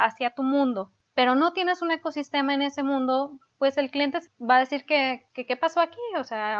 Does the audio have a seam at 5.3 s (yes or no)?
yes